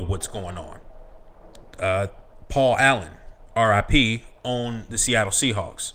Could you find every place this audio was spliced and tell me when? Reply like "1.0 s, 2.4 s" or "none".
none